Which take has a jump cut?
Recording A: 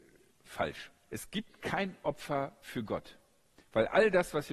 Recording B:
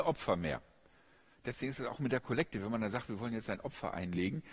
A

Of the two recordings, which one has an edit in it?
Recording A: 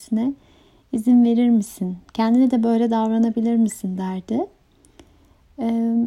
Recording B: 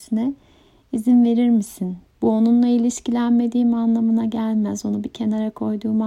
B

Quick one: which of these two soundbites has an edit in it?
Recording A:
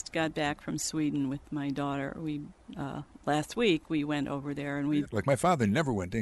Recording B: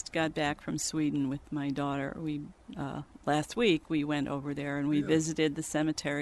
A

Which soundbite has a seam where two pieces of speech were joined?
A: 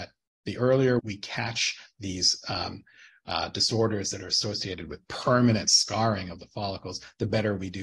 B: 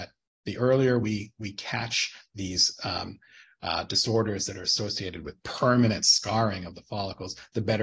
A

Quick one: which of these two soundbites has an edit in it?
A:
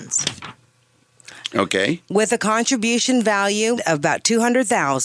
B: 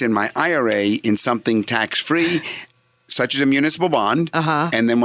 A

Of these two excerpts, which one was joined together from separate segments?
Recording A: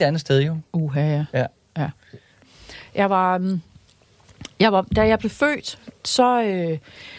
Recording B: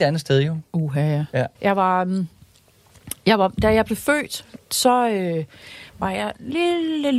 B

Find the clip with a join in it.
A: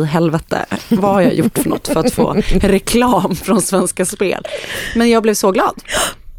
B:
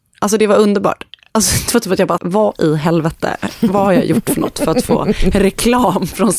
B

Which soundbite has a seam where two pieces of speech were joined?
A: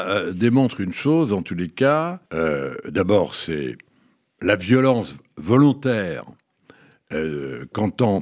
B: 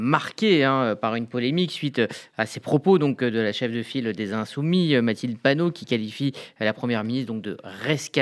A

